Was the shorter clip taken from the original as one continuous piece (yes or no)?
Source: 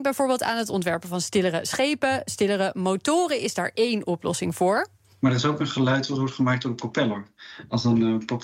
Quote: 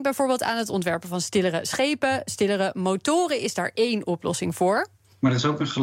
yes